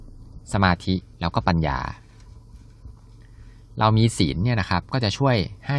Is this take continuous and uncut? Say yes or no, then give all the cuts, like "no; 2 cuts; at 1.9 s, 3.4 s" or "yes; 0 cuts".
no; 1 cut; at 1.1 s